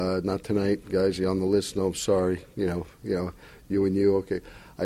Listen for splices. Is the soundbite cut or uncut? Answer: uncut